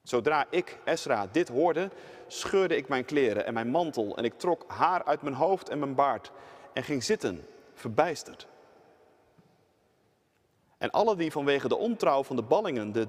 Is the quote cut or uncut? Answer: uncut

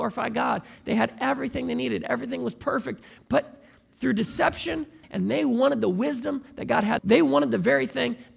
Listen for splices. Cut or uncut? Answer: cut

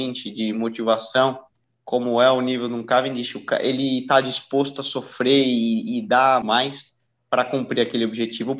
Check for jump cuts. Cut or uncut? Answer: cut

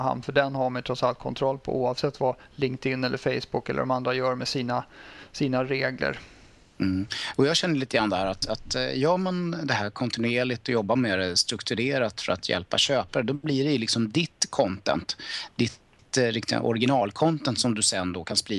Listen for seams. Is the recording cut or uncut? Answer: uncut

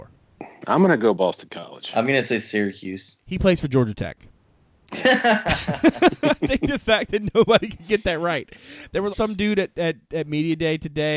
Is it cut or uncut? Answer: cut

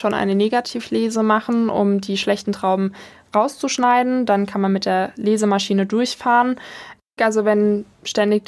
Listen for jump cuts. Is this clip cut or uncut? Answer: cut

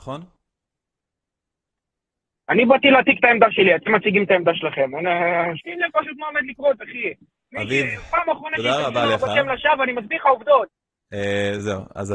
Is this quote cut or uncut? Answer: cut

